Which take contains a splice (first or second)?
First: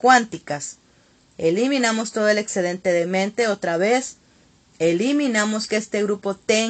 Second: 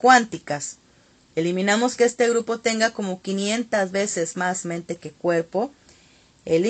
first